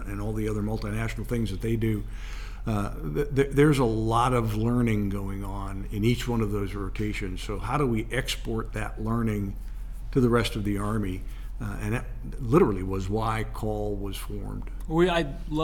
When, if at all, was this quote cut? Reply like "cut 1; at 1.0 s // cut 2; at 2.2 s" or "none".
none